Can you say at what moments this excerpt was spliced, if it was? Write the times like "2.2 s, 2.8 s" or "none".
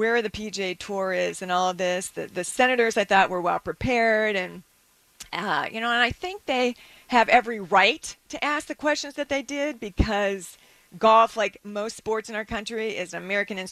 none